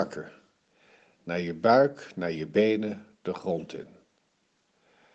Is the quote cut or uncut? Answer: uncut